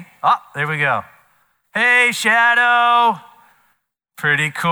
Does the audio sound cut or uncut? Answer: uncut